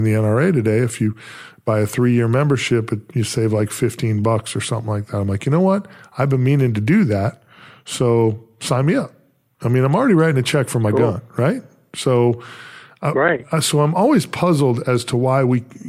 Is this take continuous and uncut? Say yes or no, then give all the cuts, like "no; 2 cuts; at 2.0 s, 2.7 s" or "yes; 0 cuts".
yes; 0 cuts